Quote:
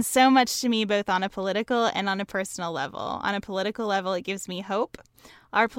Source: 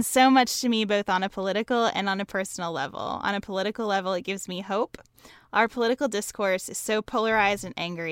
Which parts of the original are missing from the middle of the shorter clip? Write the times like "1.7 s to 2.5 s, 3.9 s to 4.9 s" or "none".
none